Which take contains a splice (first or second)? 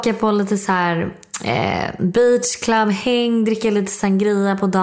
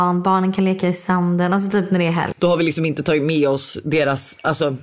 second